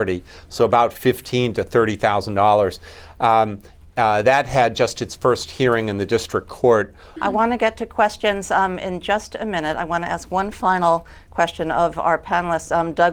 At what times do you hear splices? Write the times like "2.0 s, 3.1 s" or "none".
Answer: 7.2 s